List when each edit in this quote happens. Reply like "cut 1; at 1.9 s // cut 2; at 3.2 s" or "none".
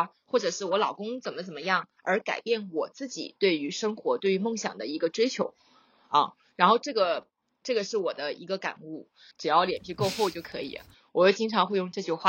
cut 1; at 9.3 s